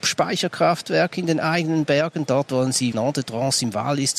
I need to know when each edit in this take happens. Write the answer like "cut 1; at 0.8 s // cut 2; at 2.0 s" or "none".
cut 1; at 2.9 s